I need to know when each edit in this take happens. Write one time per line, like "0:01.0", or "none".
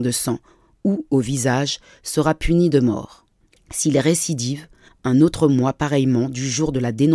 0:03.5

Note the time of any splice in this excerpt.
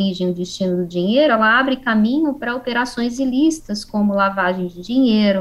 none

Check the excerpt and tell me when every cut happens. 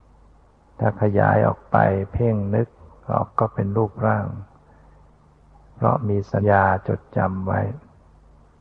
0:03.3
0:06.4

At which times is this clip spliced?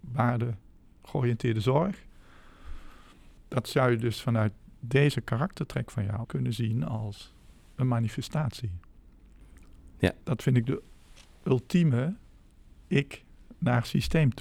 0:06.2
0:10.2

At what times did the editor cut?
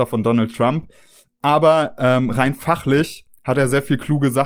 none

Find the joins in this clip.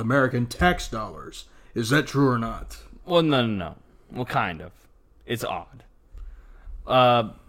none

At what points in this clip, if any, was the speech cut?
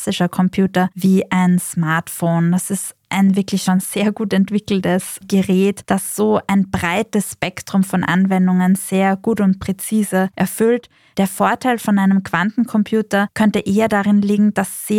none

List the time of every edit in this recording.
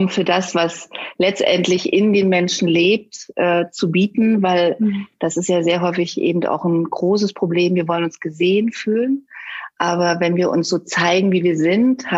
none

